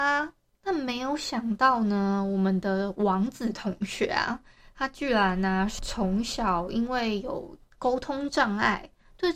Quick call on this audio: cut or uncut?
uncut